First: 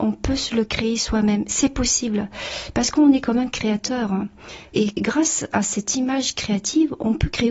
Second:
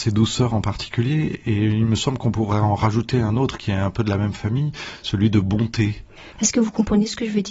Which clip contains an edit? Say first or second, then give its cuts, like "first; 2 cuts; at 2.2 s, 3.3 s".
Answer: second; 1 cut; at 6.4 s